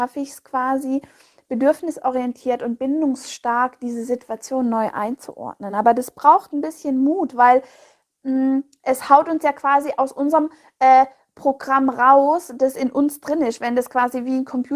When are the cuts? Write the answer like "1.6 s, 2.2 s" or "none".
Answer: none